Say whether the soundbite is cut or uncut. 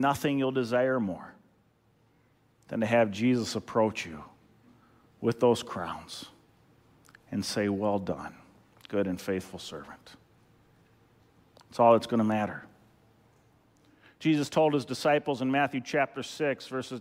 uncut